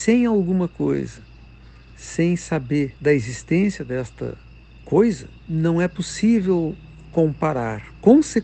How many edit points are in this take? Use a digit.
2